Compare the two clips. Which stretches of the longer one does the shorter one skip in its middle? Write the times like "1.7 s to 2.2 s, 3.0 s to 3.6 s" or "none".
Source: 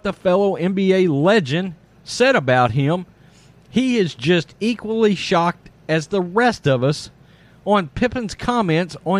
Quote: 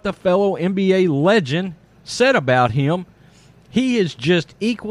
none